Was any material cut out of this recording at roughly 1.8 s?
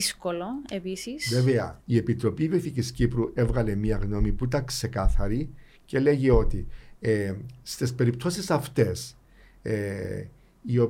yes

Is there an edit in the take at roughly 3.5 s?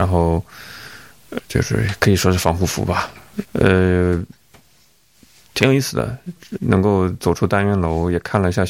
yes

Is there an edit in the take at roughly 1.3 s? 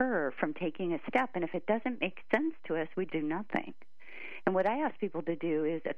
no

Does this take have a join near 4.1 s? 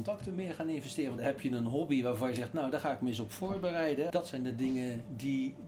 yes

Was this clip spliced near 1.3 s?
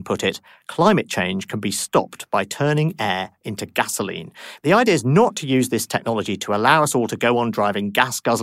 no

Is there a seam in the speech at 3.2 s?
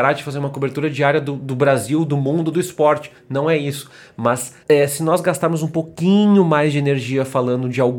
no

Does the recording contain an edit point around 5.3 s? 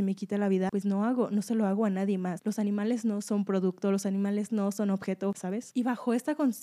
yes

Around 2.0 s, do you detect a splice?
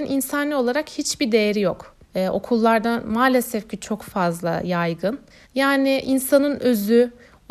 yes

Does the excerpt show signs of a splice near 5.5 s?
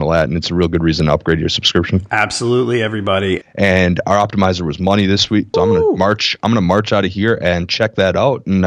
yes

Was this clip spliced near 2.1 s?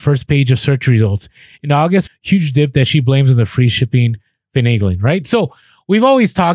yes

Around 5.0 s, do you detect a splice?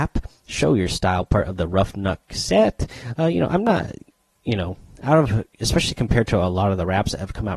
no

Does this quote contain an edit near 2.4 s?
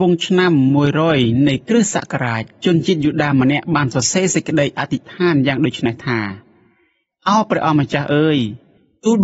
no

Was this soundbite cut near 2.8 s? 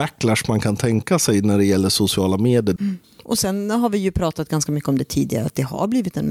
yes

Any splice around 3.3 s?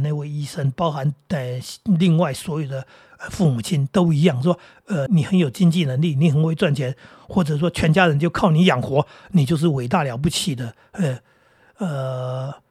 no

